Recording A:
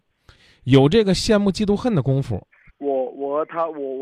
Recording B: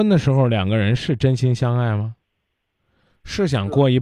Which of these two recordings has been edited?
A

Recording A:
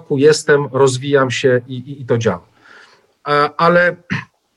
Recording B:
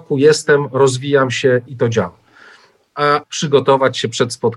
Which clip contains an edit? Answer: B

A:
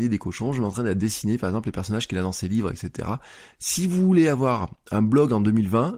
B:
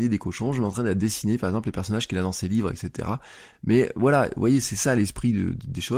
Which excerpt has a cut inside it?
A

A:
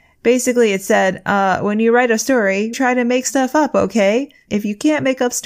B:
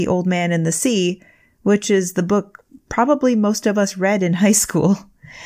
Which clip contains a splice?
A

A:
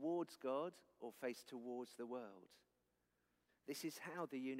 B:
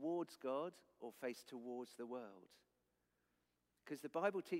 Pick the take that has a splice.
A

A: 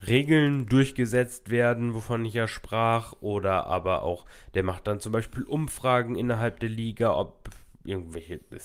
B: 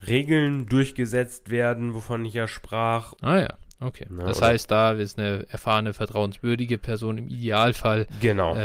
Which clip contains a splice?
B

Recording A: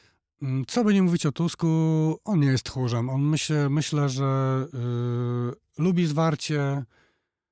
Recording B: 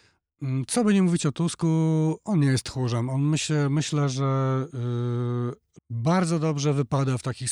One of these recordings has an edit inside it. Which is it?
B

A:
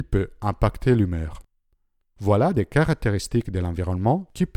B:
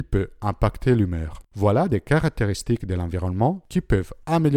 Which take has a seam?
B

